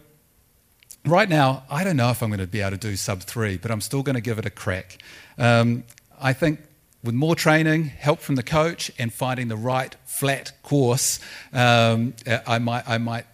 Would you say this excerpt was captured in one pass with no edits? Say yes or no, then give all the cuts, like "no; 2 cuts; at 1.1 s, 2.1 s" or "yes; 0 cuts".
yes; 0 cuts